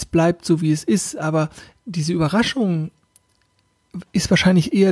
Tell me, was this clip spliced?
no; 0 cuts

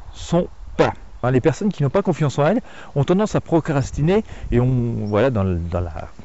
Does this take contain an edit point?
yes; 1 cut; at 1.2 s

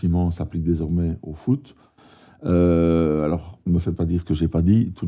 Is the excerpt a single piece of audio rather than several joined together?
yes; 0 cuts

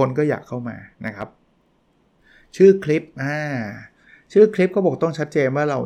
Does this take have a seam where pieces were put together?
no; 0 cuts

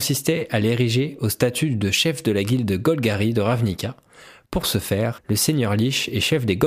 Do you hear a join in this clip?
yes; 1 cut; at 5.2 s

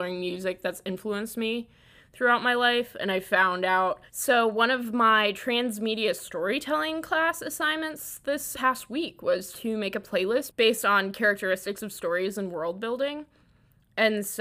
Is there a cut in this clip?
yes; 2 cuts; at 4.1 s, 8.5 s

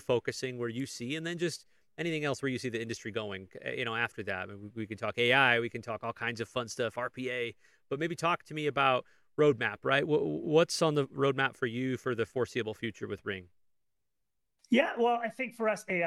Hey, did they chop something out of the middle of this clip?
no; 0 cuts

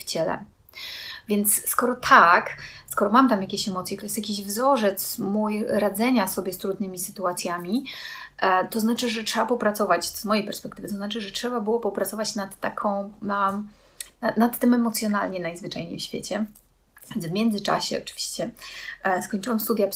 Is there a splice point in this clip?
yes; 1 cut; at 4.0 s

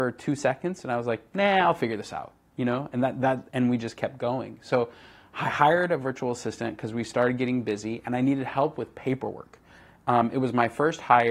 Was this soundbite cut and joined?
no; 0 cuts

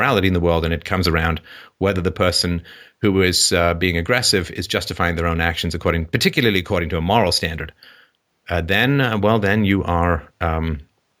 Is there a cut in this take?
no; 0 cuts

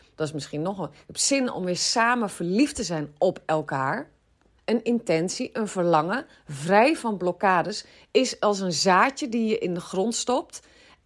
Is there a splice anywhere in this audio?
yes; 1 cut; at 4.6 s

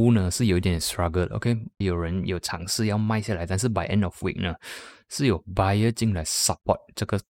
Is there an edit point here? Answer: yes; 1 cut; at 1.8 s

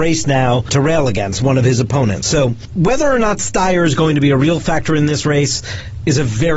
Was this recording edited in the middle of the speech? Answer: no; 0 cuts

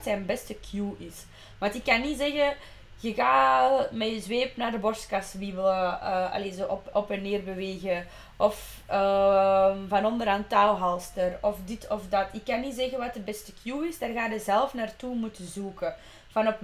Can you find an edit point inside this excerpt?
yes; 1 cut; at 6.9 s

